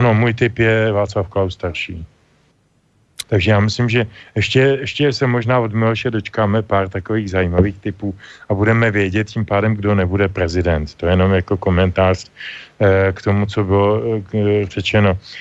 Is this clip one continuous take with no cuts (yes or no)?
no